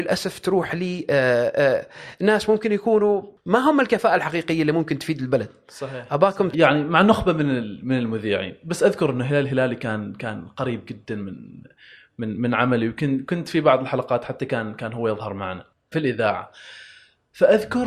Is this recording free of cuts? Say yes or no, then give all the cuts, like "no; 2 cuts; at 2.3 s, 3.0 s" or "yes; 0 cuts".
no; 2 cuts; at 6.5 s, 15.9 s